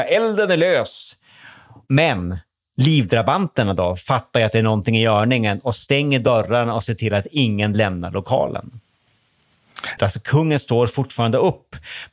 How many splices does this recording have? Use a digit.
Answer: 1